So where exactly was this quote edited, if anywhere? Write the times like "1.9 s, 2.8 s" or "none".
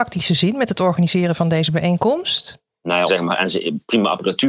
3.1 s